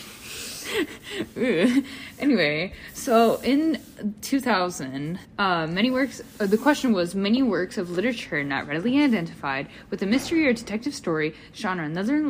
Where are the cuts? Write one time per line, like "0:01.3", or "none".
0:05.2